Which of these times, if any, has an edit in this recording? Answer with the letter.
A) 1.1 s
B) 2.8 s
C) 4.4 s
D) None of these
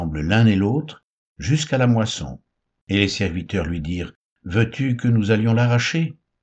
B